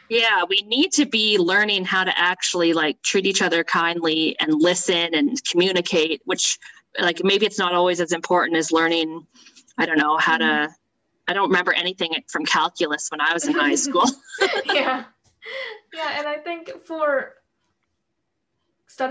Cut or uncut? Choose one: uncut